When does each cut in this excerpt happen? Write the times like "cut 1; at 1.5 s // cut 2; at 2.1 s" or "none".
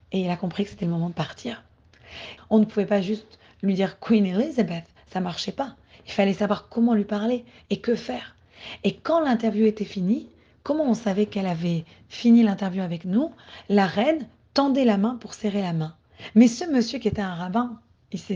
cut 1; at 2.4 s